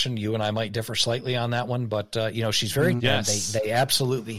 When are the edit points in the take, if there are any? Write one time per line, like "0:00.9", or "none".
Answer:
0:03.0